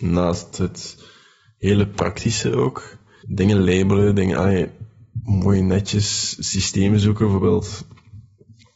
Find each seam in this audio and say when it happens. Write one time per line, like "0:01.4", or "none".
0:03.2